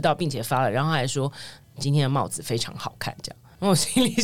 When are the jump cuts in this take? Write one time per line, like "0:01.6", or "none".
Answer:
none